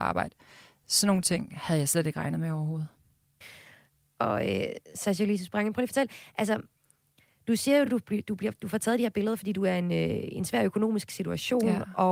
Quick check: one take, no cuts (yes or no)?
yes